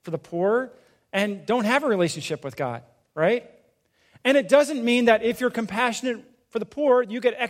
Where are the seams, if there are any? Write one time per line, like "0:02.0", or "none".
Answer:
none